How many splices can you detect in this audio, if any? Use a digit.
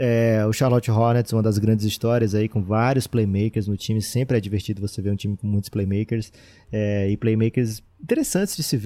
1